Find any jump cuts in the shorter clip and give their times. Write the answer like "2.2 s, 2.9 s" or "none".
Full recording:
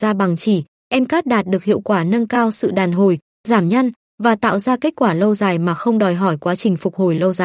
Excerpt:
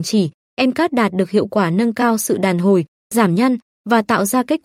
none